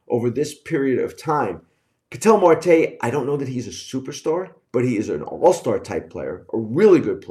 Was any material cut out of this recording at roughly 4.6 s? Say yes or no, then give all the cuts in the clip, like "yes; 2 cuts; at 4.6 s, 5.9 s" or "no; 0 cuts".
yes; 1 cut; at 4.6 s